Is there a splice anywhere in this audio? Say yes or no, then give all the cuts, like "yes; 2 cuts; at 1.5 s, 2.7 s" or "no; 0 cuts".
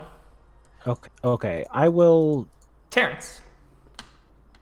yes; 2 cuts; at 1.0 s, 2.8 s